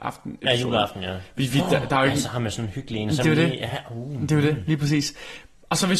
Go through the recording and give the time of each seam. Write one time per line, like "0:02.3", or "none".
none